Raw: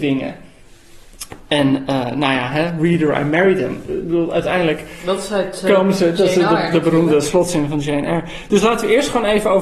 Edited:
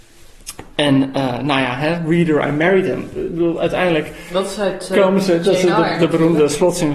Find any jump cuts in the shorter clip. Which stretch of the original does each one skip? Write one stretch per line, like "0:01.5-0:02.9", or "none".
none